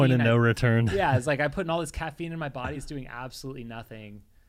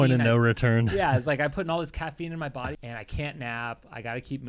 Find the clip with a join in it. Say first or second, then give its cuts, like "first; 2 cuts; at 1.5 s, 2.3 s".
second; 1 cut; at 2.7 s